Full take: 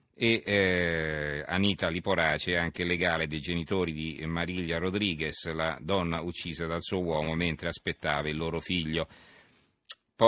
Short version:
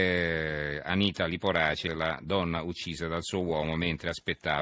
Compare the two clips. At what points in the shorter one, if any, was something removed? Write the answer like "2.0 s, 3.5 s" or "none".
1.9 s